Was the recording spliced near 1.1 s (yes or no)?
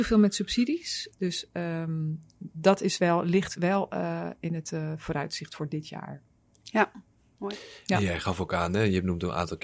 yes